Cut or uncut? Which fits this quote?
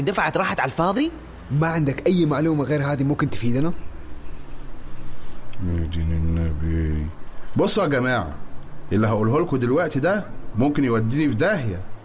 uncut